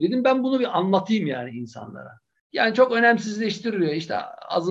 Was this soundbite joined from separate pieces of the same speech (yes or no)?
yes